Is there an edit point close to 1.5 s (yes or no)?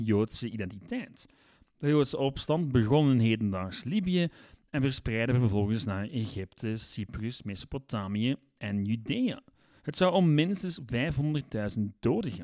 no